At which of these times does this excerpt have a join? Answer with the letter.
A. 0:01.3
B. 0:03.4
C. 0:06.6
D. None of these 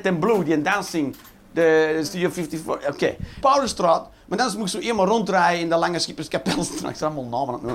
B